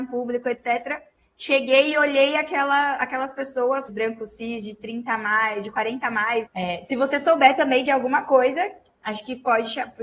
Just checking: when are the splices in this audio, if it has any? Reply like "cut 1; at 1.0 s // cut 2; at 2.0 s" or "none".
cut 1; at 3.9 s // cut 2; at 6.5 s